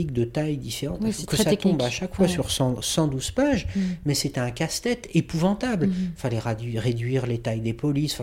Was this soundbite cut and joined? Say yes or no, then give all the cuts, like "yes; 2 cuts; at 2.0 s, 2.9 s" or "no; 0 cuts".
no; 0 cuts